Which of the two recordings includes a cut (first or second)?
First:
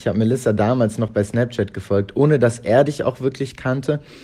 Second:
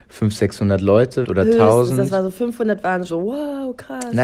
second